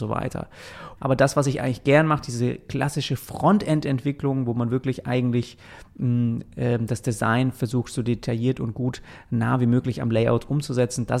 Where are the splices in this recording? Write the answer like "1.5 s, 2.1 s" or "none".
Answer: 1.0 s